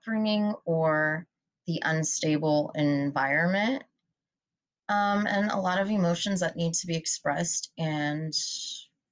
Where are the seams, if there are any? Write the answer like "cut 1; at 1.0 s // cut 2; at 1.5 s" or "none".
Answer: none